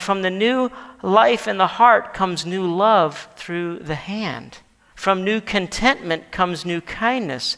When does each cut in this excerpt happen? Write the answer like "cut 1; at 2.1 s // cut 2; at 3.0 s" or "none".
cut 1; at 4.9 s